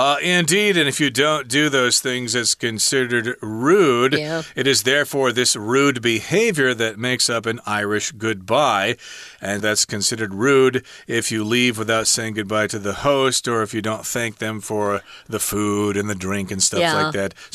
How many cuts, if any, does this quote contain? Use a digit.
1